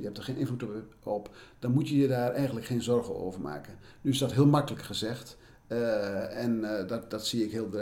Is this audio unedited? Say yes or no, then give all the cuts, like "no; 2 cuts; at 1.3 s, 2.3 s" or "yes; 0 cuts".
yes; 0 cuts